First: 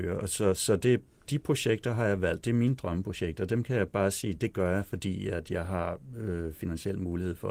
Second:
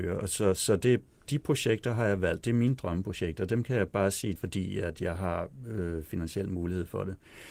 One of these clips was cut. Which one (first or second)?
second